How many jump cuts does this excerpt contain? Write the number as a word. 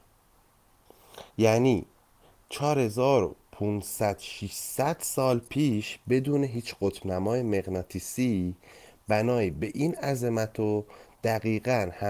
one